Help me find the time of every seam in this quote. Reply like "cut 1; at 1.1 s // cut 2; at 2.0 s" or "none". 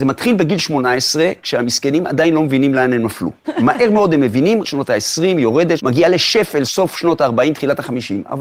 cut 1; at 4.6 s // cut 2; at 5.8 s